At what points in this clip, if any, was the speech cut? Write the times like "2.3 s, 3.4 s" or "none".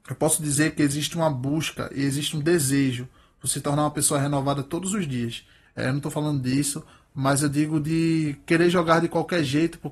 5.7 s